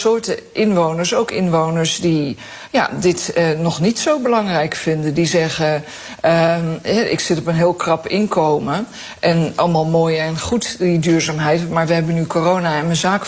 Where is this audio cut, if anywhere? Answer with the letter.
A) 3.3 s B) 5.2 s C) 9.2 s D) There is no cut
D